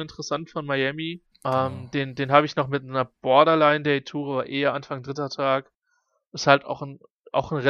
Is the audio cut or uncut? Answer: cut